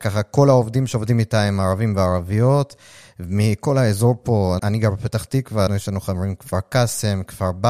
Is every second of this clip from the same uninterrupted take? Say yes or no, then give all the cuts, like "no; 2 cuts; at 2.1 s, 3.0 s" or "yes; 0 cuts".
no; 2 cuts; at 4.6 s, 5.7 s